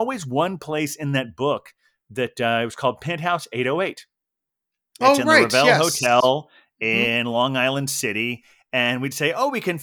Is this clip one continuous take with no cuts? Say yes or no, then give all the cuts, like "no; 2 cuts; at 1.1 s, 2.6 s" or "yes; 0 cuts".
yes; 0 cuts